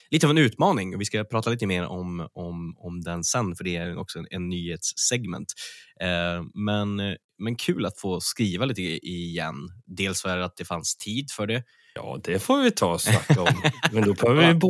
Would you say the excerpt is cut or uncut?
cut